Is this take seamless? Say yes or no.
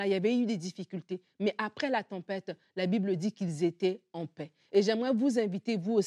yes